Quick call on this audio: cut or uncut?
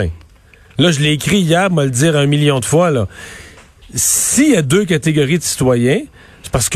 uncut